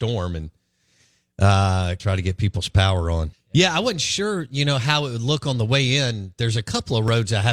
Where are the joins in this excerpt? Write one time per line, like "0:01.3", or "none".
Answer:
0:02.0
0:03.3